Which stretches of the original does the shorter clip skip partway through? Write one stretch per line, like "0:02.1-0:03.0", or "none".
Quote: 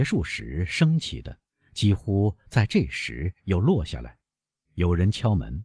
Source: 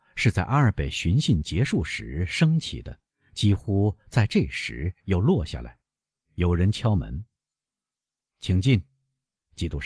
none